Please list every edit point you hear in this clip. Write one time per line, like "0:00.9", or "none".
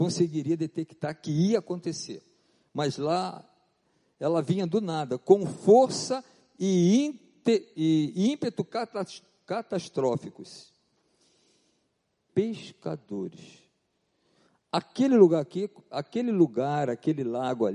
0:12.3